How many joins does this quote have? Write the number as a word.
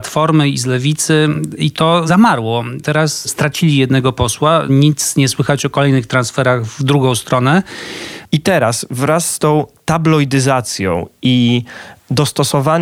one